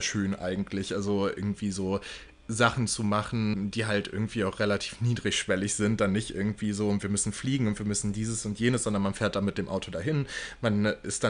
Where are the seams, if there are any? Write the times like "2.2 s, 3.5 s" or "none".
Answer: 3.5 s